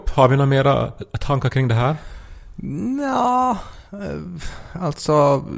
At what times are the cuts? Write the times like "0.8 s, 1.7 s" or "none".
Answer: none